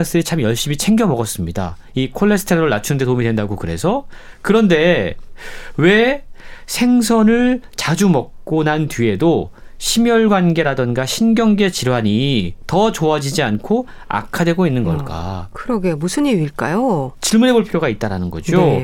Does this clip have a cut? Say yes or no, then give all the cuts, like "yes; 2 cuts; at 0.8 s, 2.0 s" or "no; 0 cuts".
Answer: no; 0 cuts